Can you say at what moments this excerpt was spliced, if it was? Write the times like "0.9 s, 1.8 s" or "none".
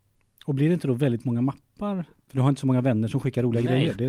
2.2 s